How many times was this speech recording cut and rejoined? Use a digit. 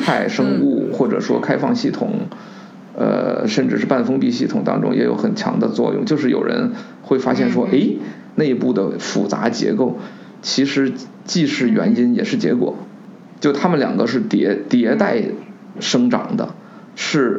1